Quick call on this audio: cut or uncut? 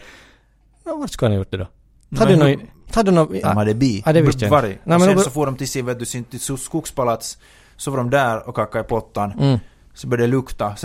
cut